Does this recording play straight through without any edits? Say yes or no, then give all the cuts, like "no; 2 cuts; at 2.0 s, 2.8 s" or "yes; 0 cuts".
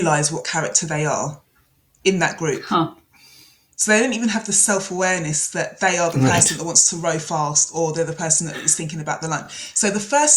yes; 0 cuts